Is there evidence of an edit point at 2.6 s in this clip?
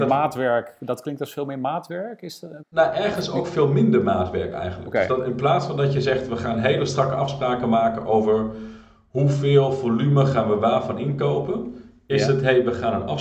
yes; 1 cut; at 2.6 s

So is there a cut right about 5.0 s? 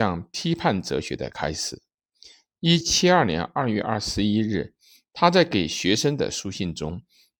no; 1 cut; at 2.8 s

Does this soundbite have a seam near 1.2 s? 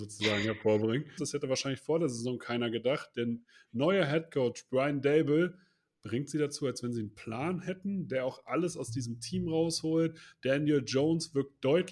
yes; 1 cut; at 1.2 s

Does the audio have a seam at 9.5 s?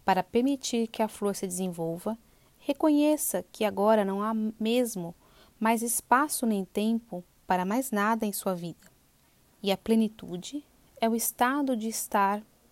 yes; 1 cut; at 9.5 s

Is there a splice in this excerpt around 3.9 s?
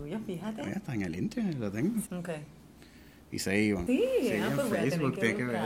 yes; 2 cuts; at 2.1 s, 3.9 s

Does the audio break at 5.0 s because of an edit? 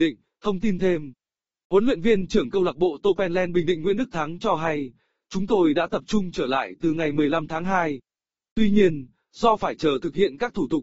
no; 0 cuts

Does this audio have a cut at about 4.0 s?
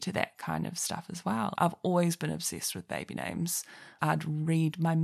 yes; 2 cuts; at 1.5 s, 4.0 s

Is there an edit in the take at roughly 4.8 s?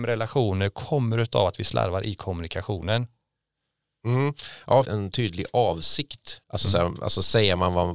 yes; 2 cuts; at 4.8 s, 6.4 s

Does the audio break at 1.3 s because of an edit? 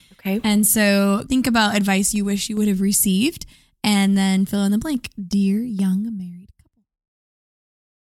yes; 1 cut; at 1.3 s

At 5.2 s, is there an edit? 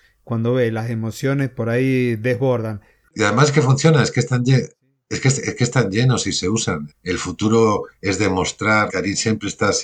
no; 2 cuts; at 6.9 s, 8.9 s

